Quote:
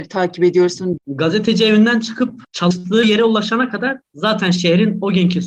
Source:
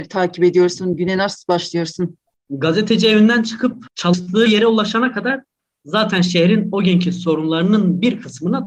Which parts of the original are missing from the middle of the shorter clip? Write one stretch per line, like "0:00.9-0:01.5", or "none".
0:01.0-0:02.4
0:05.5-0:05.7

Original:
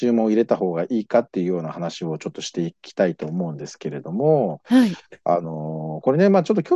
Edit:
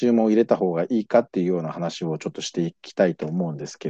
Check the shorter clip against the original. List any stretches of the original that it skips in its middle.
none

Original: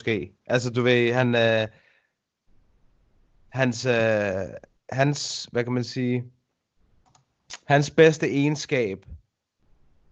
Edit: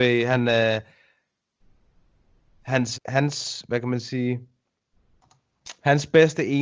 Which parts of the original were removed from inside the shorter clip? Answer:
0:03.8-0:04.8

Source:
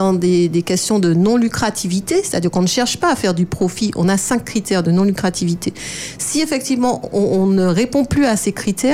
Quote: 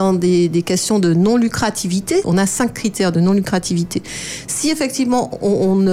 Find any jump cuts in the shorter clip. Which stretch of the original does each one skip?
0:02.2-0:03.9

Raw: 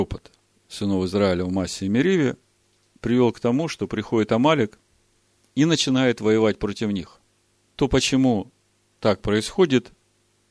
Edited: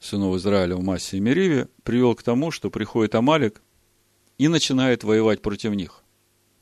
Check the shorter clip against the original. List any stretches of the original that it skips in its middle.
0:02.5-0:03.0

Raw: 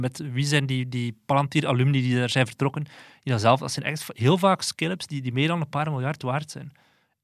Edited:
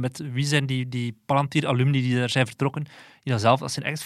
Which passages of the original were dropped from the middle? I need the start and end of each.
none

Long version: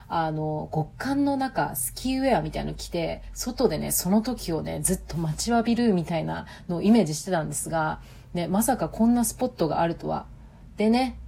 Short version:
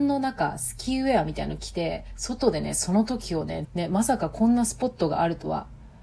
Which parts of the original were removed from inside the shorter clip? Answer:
0:04.8-0:08.2

